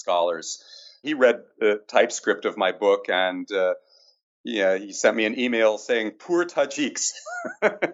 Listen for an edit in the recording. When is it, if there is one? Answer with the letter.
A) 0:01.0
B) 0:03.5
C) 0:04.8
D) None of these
A